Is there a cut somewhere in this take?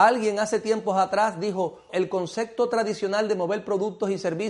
yes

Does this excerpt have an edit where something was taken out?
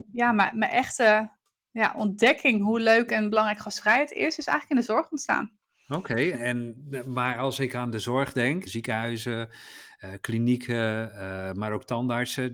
yes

